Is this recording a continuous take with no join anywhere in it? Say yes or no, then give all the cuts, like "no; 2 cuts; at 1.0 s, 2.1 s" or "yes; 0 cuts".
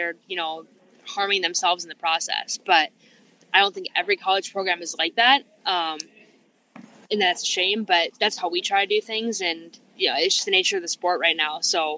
yes; 0 cuts